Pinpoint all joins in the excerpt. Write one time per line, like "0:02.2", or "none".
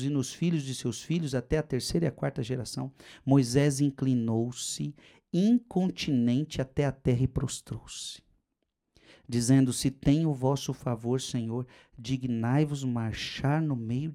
none